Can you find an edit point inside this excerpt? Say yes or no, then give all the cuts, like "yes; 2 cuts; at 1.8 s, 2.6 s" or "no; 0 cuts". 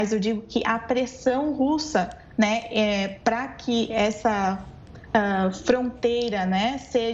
no; 0 cuts